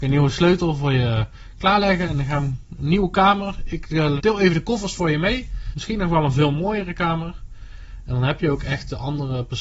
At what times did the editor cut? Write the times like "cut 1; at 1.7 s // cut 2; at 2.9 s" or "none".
cut 1; at 4.2 s // cut 2; at 5.7 s